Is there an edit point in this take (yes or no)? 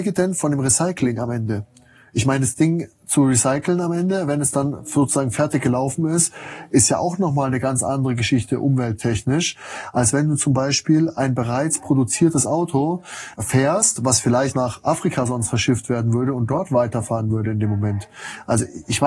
yes